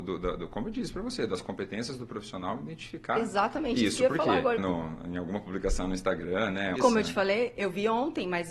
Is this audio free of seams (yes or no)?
no